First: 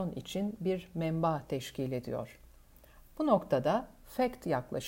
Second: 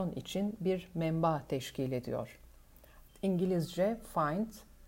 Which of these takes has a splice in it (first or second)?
second